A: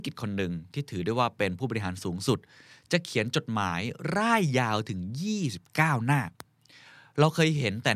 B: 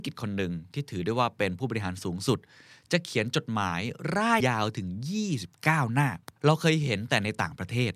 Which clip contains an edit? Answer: B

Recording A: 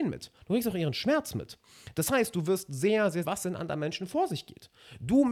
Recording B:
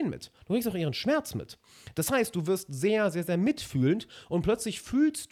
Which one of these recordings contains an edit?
A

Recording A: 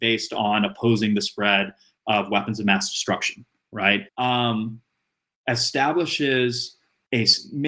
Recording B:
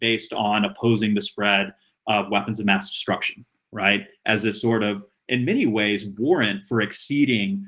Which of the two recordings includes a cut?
A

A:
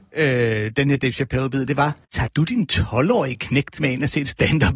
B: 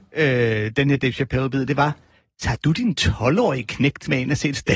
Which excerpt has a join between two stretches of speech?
A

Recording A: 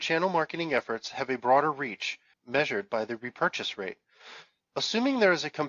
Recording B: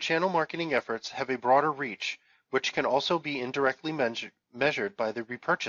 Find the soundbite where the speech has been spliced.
A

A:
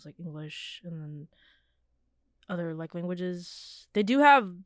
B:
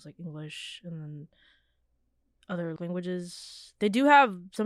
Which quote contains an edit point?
B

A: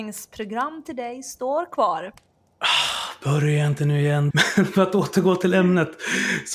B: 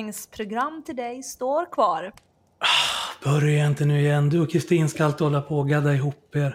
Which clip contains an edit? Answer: A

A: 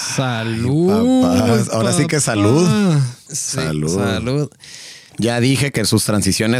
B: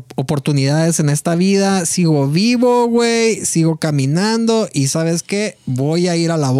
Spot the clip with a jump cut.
A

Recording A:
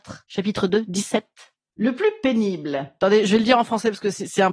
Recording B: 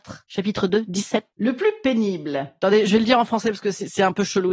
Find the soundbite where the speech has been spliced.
B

